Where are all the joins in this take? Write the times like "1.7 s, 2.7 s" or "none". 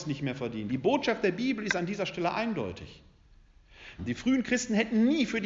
4.0 s